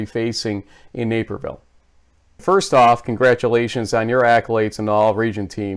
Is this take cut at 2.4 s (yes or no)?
yes